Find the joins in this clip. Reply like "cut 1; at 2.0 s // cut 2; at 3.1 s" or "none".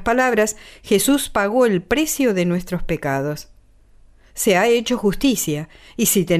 none